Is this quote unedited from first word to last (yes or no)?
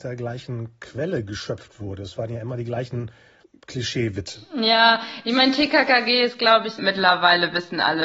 no